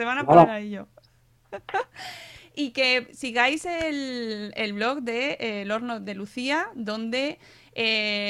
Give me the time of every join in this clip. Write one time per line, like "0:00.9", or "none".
none